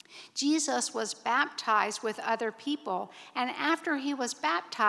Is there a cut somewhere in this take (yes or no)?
no